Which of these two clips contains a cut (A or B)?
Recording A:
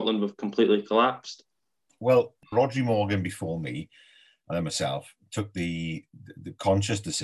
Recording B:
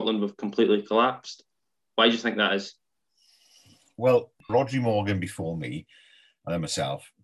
A